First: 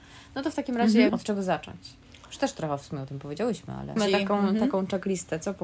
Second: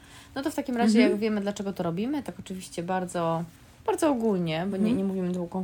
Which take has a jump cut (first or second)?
first